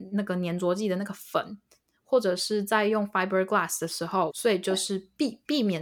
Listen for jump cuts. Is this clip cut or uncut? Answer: cut